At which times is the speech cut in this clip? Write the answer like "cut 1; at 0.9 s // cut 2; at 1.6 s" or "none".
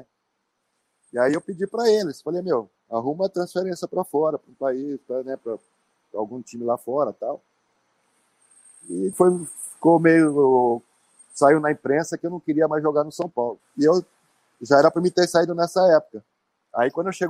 cut 1; at 9.1 s // cut 2; at 13.6 s

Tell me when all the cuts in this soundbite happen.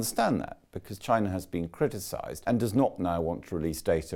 none

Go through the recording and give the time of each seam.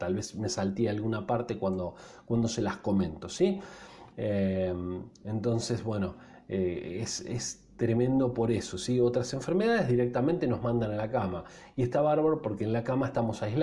cut 1; at 4.1 s

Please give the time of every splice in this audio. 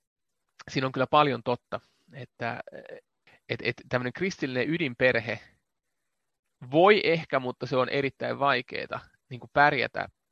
none

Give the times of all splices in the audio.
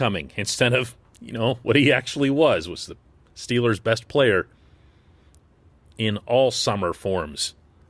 none

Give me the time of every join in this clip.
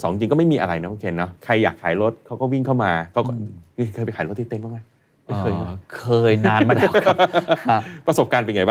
cut 1; at 1.4 s

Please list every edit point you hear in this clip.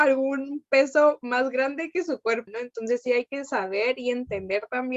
cut 1; at 2.5 s

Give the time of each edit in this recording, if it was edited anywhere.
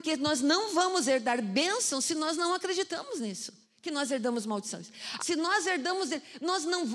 cut 1; at 5.2 s

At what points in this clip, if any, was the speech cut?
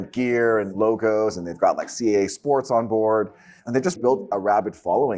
cut 1; at 4.0 s

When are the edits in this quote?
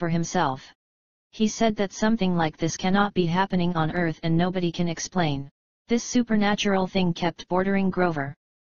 cut 1; at 5.7 s

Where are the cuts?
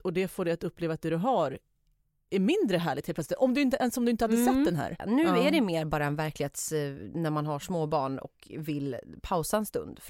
cut 1; at 5.0 s

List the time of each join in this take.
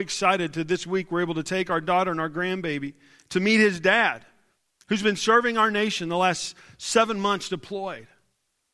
none

